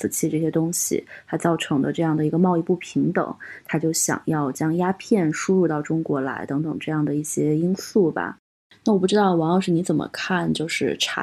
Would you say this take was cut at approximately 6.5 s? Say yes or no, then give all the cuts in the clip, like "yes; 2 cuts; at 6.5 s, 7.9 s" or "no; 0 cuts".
no; 0 cuts